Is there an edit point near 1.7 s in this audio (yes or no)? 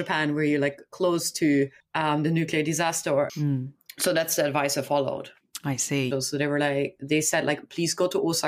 no